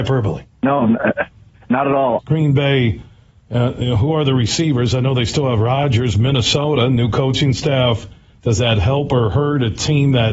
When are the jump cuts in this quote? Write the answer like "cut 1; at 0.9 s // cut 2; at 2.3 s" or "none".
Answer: cut 1; at 2.2 s

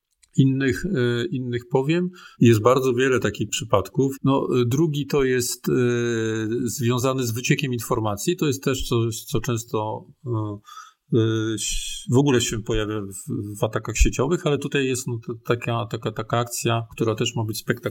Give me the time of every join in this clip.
cut 1; at 2.4 s // cut 2; at 4.2 s

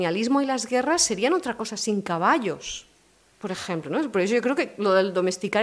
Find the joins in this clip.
none

